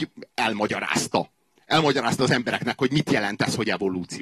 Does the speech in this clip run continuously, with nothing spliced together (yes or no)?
yes